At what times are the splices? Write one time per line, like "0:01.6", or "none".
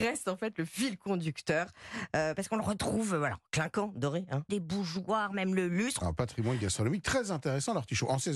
0:04.5
0:06.0